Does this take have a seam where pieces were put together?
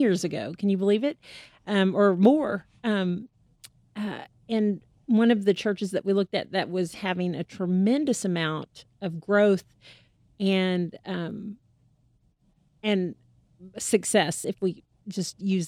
no; 0 cuts

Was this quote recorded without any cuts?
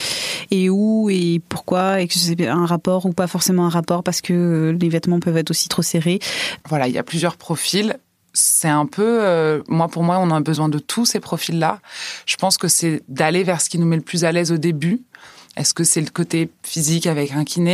no; 1 cut; at 6.6 s

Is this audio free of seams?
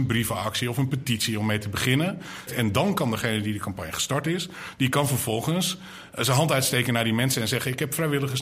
no; 1 cut; at 2.5 s

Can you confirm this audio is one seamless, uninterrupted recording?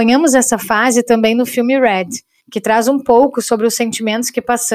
no; 1 cut; at 2.4 s

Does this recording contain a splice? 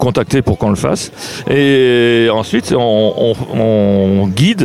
no; 0 cuts

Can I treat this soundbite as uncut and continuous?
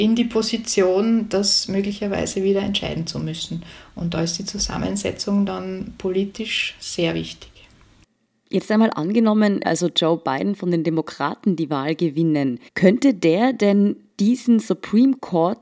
no; 2 cuts; at 9.6 s, 12.7 s

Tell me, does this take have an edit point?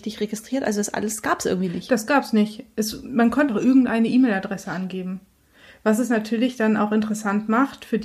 yes; 1 cut; at 3.5 s

